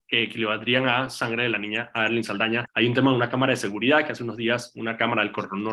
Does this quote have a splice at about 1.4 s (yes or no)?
no